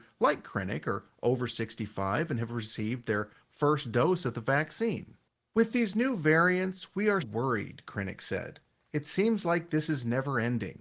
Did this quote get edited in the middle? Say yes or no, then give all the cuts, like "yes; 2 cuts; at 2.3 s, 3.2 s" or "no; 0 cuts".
yes; 1 cut; at 7.2 s